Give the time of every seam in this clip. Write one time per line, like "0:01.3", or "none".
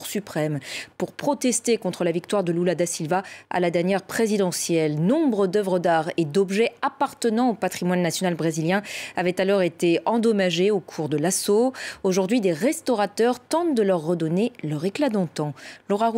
none